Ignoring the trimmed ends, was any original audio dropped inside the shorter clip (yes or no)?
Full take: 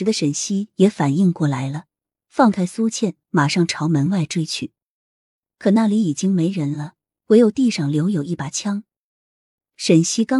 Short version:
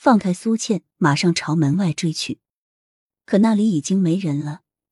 no